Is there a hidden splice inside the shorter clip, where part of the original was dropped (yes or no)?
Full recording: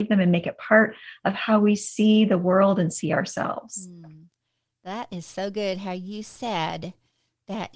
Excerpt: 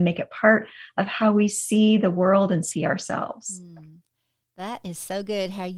no